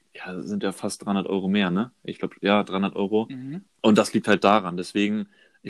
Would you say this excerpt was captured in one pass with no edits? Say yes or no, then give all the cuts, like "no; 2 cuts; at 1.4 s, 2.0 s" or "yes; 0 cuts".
yes; 0 cuts